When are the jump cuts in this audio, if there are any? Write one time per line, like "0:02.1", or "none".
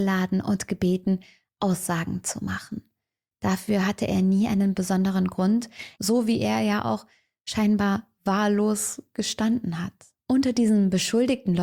0:03.3
0:06.0